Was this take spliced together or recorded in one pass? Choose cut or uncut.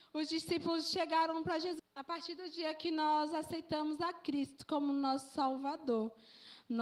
cut